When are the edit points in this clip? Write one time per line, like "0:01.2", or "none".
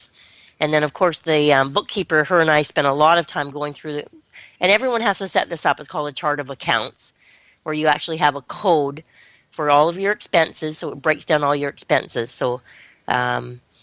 none